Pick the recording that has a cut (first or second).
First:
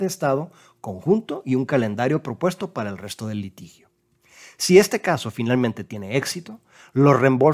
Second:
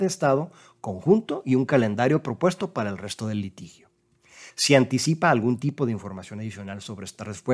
second